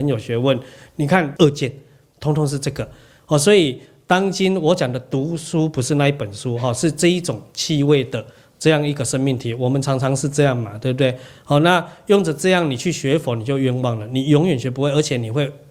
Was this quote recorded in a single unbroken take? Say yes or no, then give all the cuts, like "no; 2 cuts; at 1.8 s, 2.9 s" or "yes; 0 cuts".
no; 1 cut; at 1.4 s